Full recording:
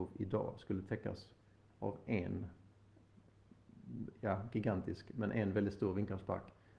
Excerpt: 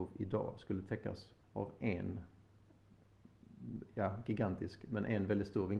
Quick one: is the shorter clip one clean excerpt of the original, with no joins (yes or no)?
no